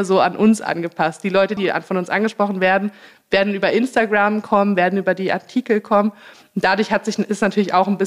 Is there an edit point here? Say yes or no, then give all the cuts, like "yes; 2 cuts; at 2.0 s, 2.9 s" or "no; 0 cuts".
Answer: yes; 1 cut; at 1.6 s